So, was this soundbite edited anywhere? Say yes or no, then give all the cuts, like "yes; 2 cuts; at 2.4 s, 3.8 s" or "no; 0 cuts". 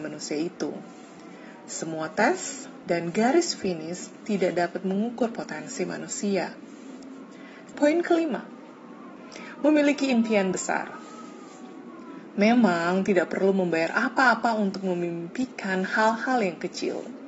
yes; 2 cuts; at 2.8 s, 7.7 s